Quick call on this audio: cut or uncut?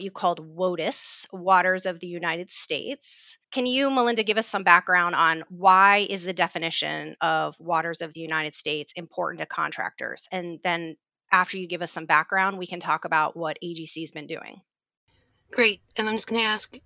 cut